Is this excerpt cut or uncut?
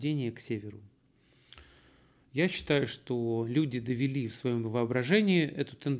uncut